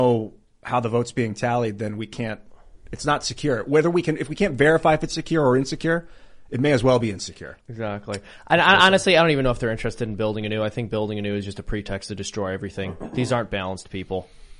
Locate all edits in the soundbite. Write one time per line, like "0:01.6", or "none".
0:07.6